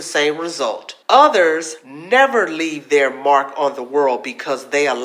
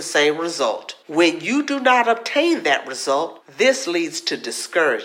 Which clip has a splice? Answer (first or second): first